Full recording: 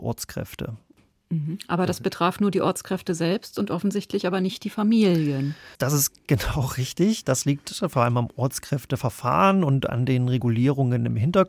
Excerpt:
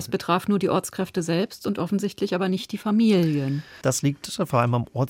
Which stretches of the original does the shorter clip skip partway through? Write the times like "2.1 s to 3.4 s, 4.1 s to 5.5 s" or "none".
5.7 s to 7.2 s